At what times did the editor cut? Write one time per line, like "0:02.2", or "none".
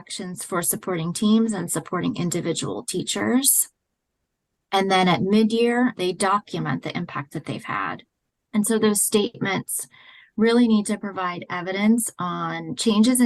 0:05.9